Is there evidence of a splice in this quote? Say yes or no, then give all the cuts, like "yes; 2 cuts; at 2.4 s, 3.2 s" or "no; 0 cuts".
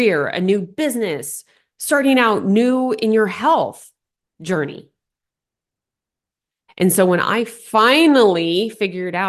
yes; 1 cut; at 6.7 s